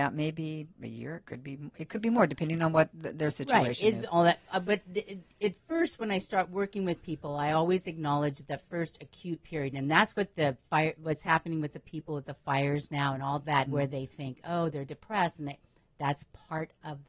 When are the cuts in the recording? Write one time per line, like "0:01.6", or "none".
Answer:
0:13.7